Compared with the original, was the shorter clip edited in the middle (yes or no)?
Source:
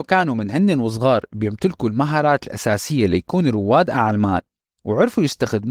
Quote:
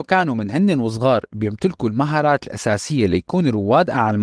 no